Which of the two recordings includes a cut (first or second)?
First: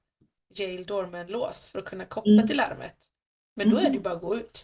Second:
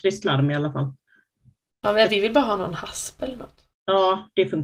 second